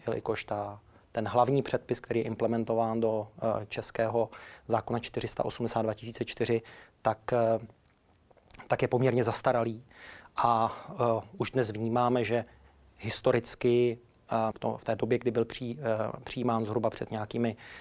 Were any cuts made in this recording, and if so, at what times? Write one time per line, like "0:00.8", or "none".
0:14.5